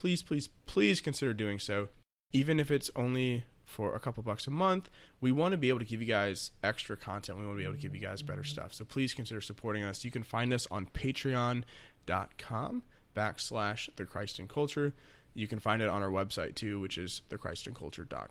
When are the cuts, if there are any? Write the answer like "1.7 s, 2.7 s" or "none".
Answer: none